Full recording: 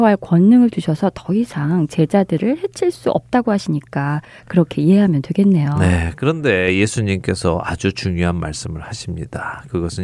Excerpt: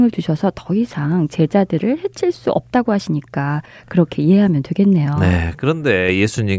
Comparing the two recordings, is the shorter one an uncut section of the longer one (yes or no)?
yes